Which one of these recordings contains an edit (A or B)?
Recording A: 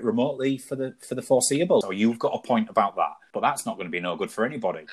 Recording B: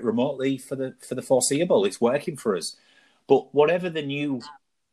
A